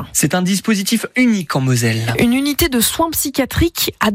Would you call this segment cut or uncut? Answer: uncut